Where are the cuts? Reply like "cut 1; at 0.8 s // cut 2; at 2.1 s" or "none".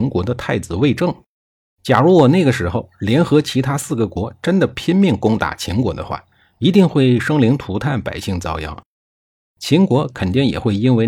cut 1; at 1.7 s